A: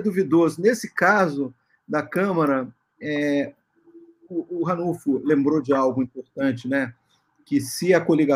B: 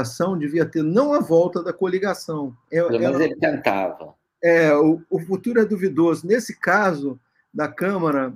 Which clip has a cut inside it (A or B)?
B